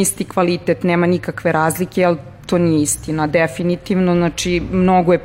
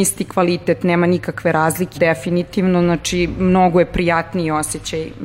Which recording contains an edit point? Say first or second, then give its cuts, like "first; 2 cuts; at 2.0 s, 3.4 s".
second; 1 cut; at 1.9 s